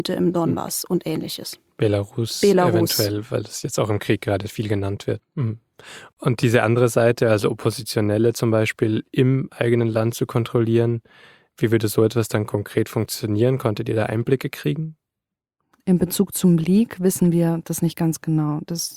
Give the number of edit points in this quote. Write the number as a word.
one